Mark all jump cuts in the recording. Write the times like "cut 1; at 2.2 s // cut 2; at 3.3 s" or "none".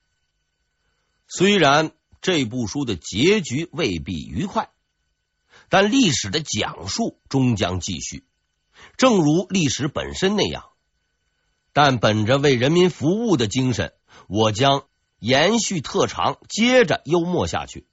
none

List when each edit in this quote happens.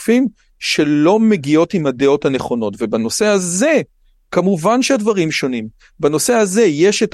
none

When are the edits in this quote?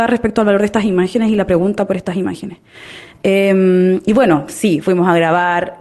none

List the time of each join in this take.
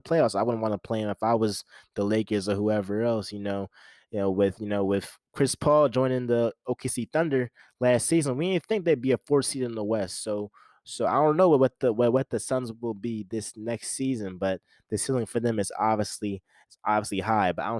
none

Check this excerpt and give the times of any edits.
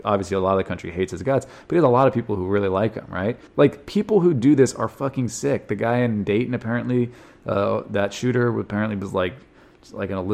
cut 1; at 3.5 s

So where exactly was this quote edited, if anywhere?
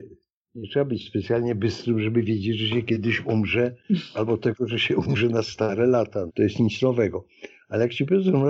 cut 1; at 6.3 s

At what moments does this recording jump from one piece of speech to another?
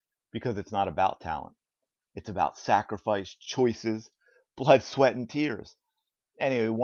none

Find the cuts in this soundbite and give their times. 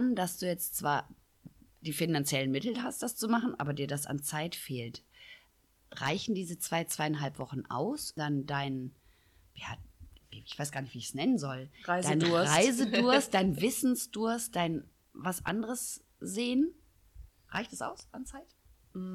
cut 1; at 8.2 s

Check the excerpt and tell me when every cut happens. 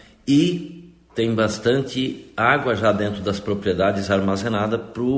none

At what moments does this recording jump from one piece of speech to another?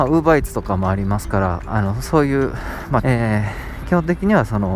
cut 1; at 3.0 s

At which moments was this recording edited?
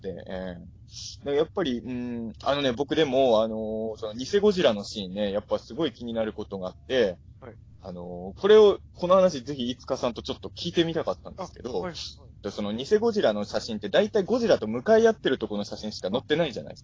cut 1; at 12.4 s

